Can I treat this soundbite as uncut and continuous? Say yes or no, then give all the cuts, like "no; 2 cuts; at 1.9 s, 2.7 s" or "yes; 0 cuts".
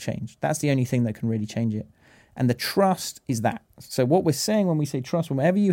yes; 0 cuts